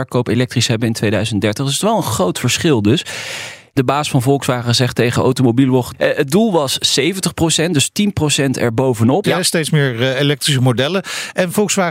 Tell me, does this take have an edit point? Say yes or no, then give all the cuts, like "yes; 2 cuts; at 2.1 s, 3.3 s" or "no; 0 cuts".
yes; 2 cuts; at 5.9 s, 9.2 s